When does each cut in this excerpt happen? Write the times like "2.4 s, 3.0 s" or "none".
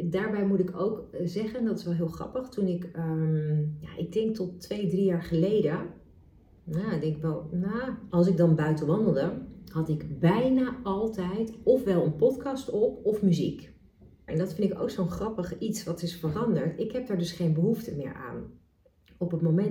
8.1 s, 14.3 s